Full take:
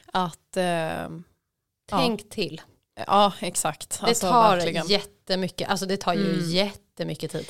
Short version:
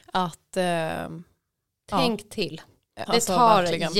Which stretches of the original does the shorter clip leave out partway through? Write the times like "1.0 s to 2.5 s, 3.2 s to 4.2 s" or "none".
3.1 s to 4.0 s